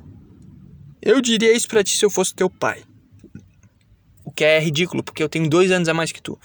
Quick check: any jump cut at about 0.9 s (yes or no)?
yes